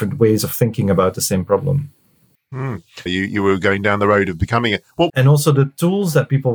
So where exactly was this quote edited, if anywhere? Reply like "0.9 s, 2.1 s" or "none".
3.1 s, 5.1 s